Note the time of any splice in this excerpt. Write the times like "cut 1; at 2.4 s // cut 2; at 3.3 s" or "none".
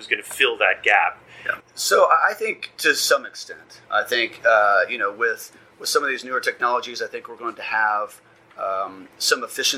cut 1; at 1.6 s